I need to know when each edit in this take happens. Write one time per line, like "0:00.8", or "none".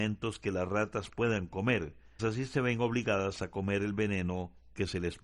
0:02.2